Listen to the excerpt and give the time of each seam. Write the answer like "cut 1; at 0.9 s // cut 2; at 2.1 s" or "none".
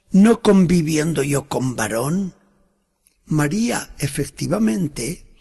cut 1; at 3.1 s